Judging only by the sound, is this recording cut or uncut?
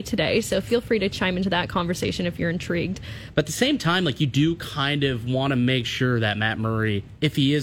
cut